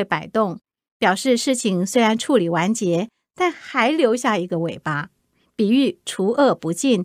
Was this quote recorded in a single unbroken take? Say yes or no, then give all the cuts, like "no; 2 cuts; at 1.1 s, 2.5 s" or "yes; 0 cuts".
yes; 0 cuts